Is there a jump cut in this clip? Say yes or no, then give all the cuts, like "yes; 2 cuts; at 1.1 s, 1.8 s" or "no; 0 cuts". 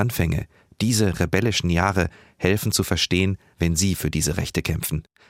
yes; 1 cut; at 3.5 s